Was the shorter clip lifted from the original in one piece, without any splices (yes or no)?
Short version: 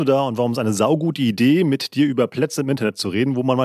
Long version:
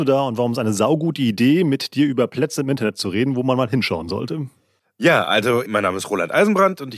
yes